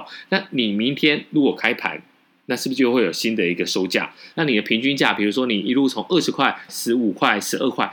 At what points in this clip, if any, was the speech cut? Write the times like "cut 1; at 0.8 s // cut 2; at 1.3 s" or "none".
cut 1; at 4.3 s // cut 2; at 6.7 s